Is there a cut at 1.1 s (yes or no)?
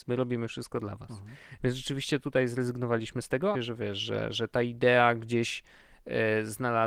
no